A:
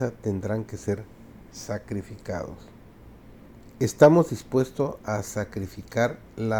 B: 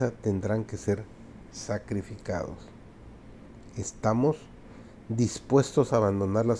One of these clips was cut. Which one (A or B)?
A